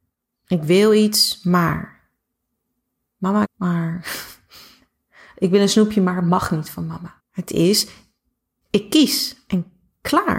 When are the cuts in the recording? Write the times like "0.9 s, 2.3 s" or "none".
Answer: 3.4 s, 7.2 s